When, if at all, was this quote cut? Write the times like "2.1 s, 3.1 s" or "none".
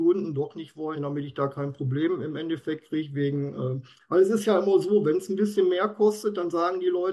1.0 s